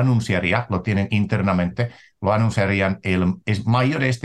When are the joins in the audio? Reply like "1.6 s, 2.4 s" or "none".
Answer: none